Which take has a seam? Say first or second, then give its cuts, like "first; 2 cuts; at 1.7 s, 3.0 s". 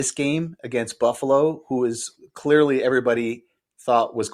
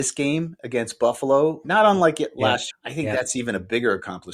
second; 2 cuts; at 1.6 s, 2.7 s